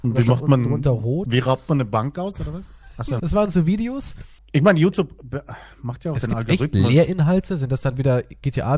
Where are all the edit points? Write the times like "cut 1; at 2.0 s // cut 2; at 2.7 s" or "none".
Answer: cut 1; at 3.2 s // cut 2; at 4.4 s